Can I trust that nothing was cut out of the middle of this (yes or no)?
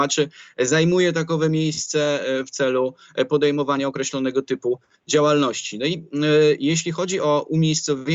yes